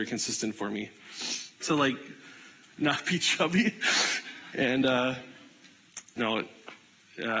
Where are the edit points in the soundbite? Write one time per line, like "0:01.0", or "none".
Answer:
0:01.6
0:04.5
0:06.2